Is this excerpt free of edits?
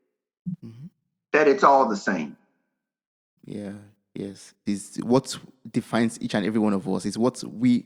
no; 2 cuts; at 3.4 s, 4.7 s

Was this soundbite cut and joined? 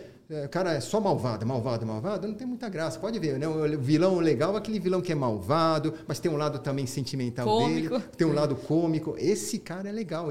no; 0 cuts

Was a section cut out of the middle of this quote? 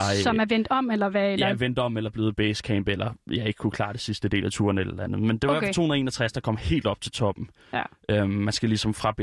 no; 0 cuts

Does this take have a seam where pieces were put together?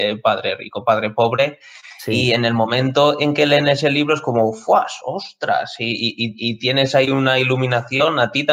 no; 0 cuts

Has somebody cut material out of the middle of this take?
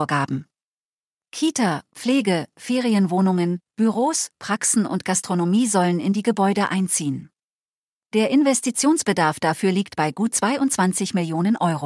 yes; 1 cut; at 1.9 s

